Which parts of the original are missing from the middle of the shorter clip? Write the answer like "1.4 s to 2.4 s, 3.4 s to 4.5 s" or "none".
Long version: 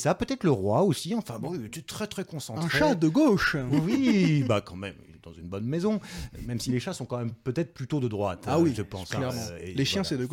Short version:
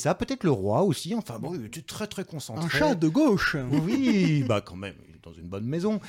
none